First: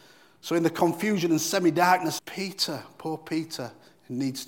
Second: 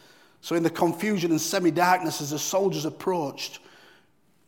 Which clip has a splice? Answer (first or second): first